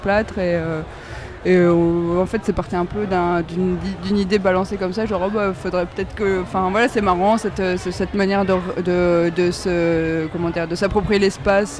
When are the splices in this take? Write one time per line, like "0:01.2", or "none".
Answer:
none